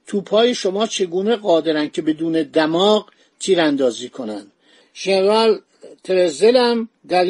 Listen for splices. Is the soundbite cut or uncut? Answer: cut